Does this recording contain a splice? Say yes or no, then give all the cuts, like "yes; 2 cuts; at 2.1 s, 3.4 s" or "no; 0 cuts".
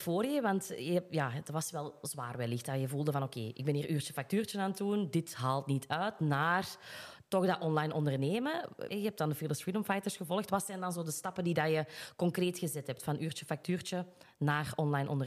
yes; 1 cut; at 8.9 s